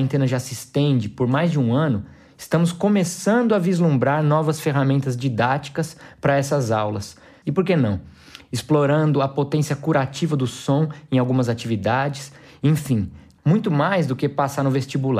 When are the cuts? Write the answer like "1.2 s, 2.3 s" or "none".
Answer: 7.4 s, 13.4 s